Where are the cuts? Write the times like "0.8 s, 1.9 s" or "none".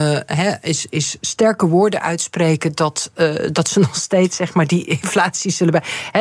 none